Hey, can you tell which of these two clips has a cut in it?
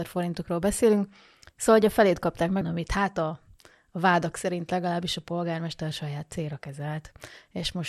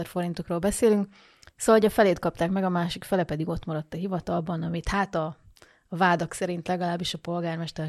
first; 1 cut; at 2.6 s

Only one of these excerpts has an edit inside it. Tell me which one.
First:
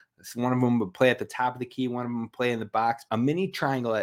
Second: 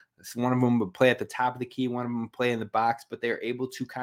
first; 1 cut; at 3.1 s

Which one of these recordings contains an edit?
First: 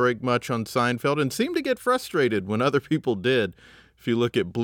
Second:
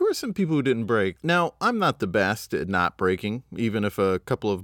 second; 1 cut; at 1.2 s

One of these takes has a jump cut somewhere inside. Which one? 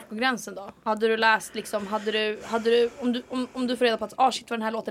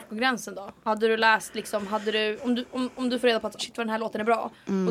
second; 2 cuts; at 2.4 s, 3.6 s

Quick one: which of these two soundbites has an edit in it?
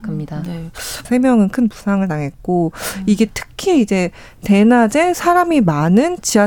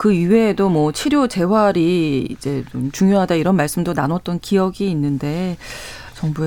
first; 1 cut; at 1.0 s

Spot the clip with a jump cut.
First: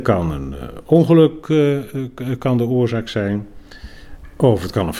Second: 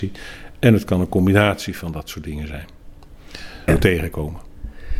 second; 1 cut; at 3.7 s

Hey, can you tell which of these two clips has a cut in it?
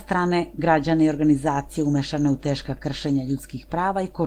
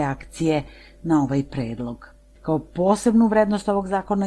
second; 1 cut; at 2.3 s

